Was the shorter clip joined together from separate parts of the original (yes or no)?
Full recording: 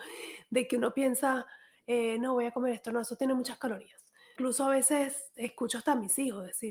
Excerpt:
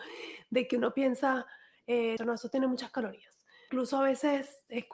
yes